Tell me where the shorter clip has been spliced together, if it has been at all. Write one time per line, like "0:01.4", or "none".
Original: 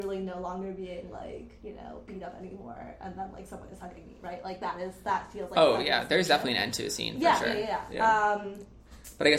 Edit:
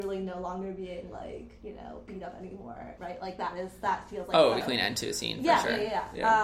0:03.0
0:04.6